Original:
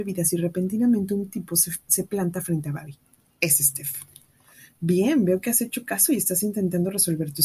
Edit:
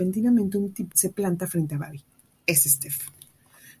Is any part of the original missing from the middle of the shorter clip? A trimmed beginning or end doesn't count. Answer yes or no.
yes